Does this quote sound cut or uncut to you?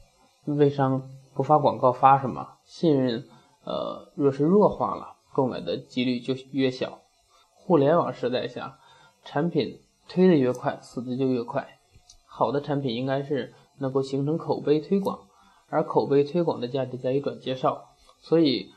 cut